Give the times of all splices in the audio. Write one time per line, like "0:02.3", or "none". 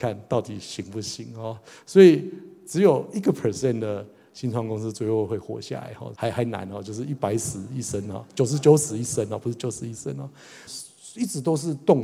0:06.1
0:10.7